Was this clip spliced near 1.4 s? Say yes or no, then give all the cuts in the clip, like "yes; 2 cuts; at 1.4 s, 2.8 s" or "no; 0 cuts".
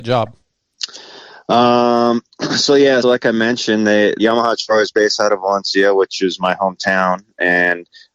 no; 2 cuts; at 3.0 s, 4.2 s